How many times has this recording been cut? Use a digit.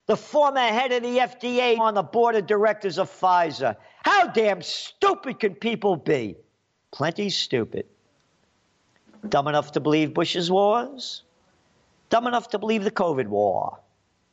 1